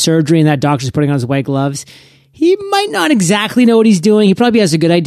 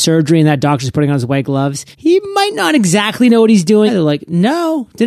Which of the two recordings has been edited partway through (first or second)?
second